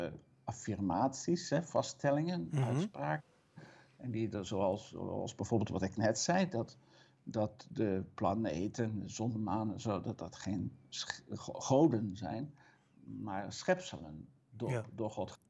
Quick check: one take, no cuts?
yes; 0 cuts

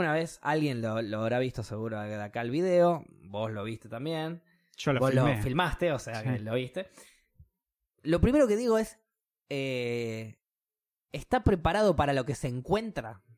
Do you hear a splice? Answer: no; 0 cuts

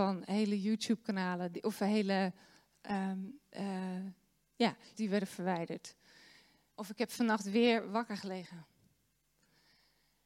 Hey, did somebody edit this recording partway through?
yes; 2 cuts; at 4.9 s, 6.7 s

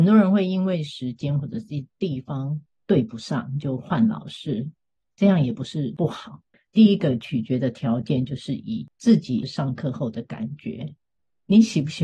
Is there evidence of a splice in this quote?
yes; 2 cuts; at 6.5 s, 8.9 s

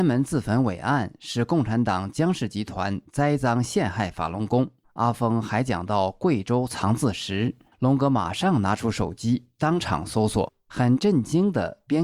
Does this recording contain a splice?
no; 0 cuts

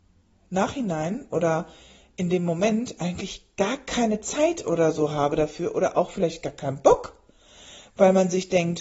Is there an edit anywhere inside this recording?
no; 0 cuts

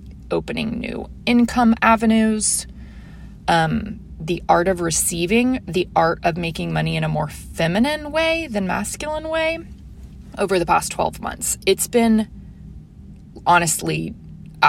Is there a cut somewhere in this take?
no; 0 cuts

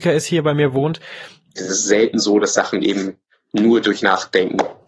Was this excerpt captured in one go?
no; 1 cut; at 1.6 s

